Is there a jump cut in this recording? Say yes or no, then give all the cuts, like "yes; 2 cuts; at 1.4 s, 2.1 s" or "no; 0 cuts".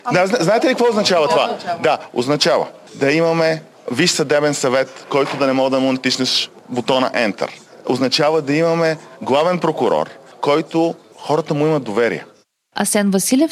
no; 0 cuts